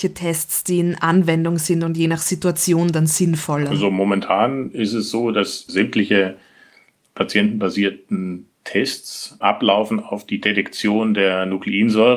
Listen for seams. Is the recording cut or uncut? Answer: cut